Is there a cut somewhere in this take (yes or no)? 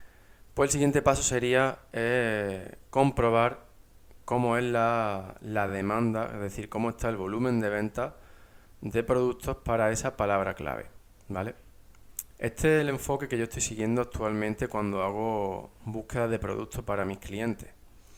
no